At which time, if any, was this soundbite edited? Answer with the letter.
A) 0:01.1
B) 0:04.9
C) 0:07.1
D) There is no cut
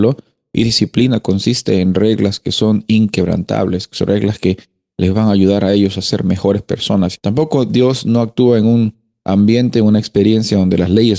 C